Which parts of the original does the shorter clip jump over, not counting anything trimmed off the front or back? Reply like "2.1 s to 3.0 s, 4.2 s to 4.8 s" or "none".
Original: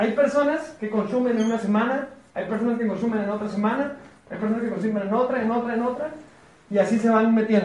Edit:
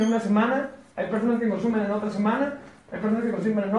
none